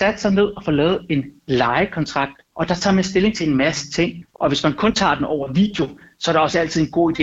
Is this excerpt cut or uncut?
cut